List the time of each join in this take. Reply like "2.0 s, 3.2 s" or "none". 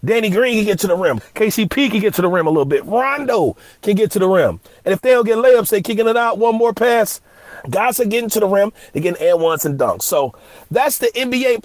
1.2 s, 7.6 s